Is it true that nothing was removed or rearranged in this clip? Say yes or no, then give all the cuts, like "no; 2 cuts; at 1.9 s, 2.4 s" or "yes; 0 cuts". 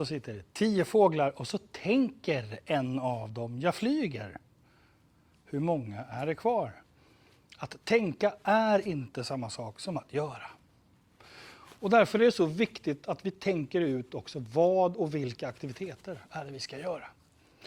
yes; 0 cuts